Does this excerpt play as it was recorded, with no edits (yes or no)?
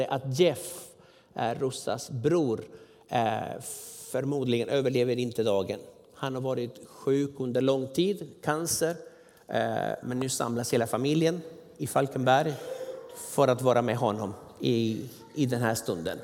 no